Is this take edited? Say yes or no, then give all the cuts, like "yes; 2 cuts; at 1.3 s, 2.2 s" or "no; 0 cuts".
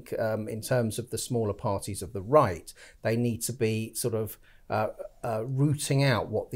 no; 0 cuts